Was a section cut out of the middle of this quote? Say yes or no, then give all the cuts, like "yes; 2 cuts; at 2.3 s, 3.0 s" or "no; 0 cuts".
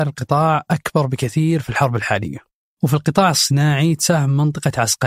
no; 0 cuts